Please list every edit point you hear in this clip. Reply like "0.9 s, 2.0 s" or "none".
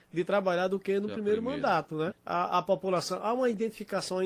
2.1 s